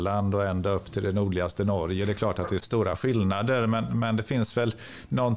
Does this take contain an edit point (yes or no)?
yes